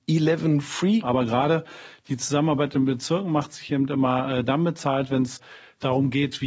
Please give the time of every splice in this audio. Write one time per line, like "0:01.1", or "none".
0:01.0